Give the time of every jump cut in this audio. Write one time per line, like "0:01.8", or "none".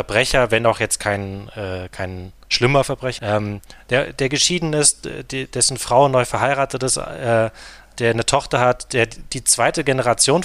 0:03.2